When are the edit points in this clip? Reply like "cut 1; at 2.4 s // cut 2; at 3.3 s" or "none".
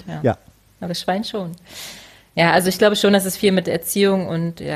none